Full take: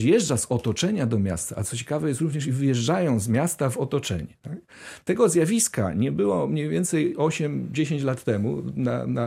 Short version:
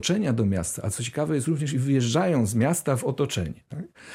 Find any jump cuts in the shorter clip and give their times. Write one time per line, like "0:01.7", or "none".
none